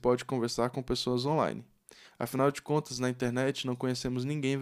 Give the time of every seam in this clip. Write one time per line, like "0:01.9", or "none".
0:02.1